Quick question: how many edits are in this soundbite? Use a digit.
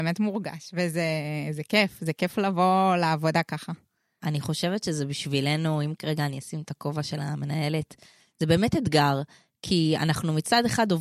1